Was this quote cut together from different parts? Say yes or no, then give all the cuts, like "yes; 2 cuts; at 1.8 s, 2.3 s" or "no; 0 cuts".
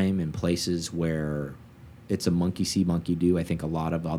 no; 0 cuts